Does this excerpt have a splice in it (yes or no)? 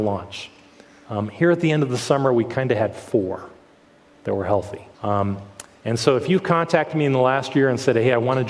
yes